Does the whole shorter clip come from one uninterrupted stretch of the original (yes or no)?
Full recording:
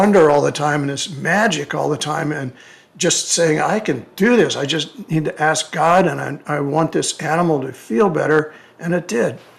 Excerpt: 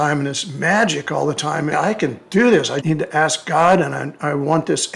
no